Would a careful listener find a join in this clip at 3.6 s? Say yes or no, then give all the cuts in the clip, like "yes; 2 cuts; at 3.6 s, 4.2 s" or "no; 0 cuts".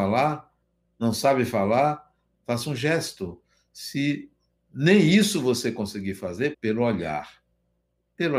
no; 1 cut; at 6.5 s